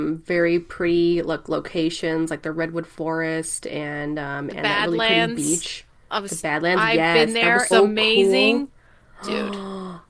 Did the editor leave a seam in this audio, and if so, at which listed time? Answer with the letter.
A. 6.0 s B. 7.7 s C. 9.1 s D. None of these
B